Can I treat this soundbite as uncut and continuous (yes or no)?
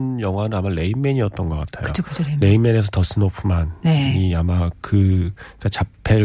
no